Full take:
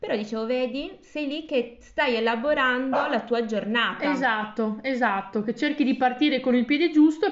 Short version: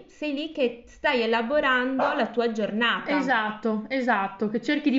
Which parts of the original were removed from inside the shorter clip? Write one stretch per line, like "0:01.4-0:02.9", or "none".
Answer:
none